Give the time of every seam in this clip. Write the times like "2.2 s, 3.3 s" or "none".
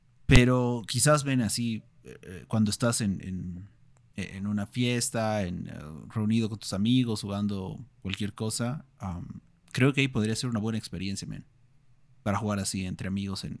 none